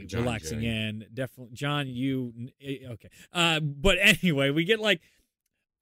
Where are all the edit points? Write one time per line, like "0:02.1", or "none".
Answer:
none